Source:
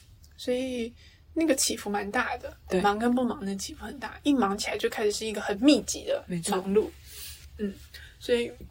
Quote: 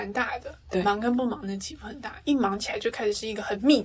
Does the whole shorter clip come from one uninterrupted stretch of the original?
yes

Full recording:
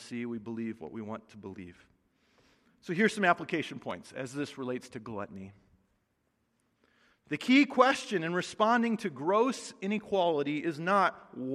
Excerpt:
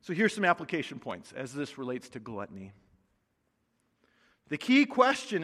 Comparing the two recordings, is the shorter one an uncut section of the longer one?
yes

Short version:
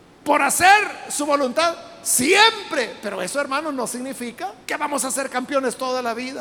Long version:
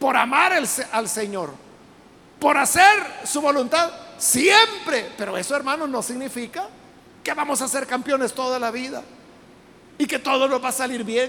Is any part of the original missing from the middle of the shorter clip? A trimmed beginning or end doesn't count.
yes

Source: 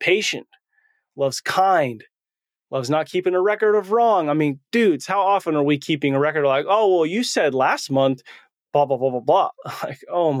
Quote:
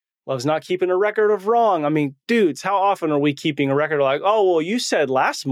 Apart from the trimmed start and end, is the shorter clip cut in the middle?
no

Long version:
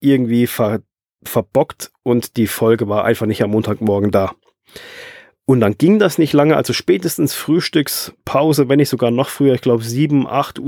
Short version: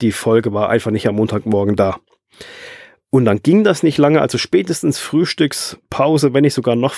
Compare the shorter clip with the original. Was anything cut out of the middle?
no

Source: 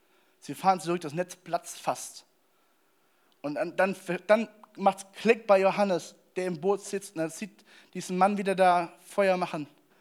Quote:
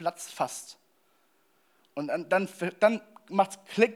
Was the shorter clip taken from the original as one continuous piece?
yes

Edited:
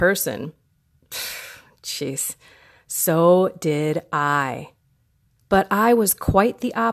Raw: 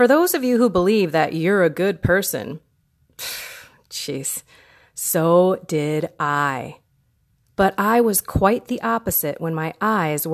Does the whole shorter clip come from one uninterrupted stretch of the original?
yes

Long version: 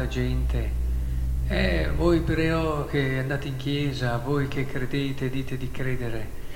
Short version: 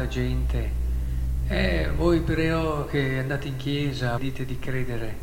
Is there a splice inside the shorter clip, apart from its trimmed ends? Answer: yes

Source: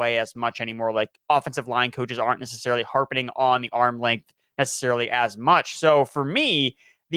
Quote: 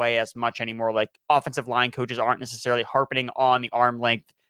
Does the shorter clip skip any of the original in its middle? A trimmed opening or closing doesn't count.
no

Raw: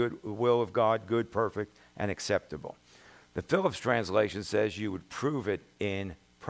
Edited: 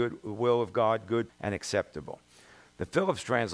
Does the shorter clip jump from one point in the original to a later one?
yes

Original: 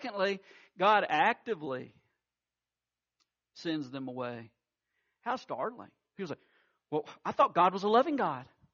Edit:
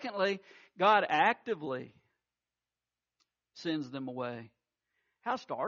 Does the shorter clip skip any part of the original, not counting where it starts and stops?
no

